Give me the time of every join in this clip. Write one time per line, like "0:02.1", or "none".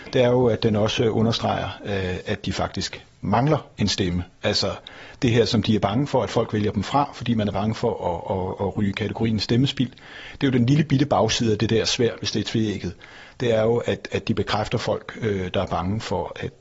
none